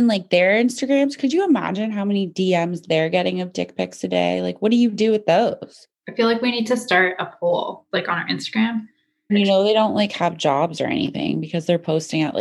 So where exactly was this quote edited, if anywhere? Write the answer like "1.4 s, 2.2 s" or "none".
5.9 s, 9.3 s